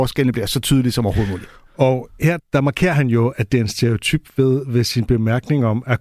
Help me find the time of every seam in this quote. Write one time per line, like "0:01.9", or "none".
0:02.4